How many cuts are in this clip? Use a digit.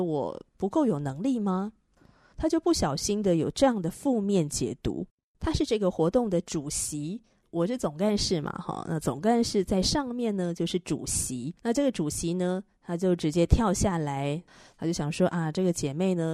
2